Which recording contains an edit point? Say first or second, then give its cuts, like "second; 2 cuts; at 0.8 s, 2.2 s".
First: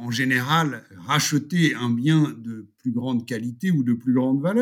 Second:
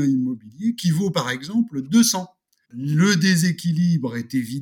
second; 1 cut; at 2.6 s